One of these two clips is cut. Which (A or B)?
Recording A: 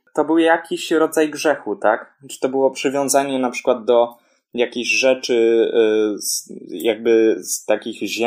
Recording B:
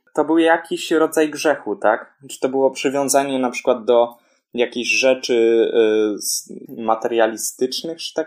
B